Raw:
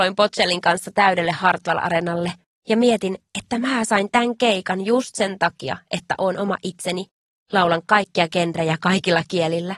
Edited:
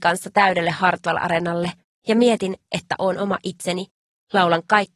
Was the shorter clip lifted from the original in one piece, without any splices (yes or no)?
no